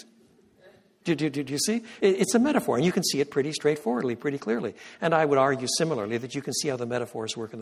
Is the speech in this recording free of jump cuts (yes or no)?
yes